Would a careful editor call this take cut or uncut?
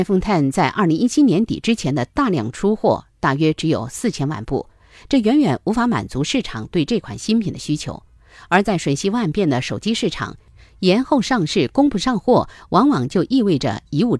uncut